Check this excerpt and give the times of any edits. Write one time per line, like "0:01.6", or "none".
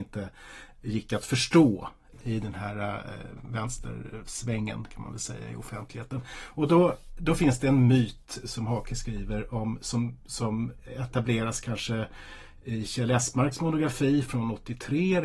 0:02.1